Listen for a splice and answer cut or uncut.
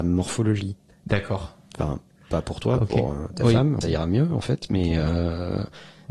cut